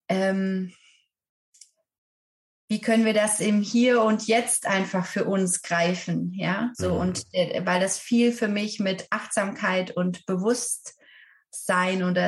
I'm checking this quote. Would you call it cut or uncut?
uncut